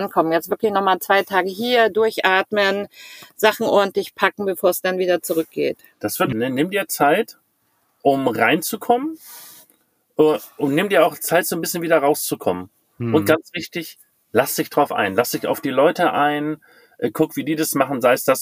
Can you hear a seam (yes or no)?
yes